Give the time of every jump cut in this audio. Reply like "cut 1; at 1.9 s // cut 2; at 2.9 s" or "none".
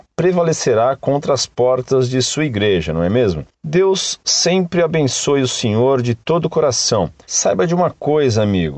cut 1; at 7.2 s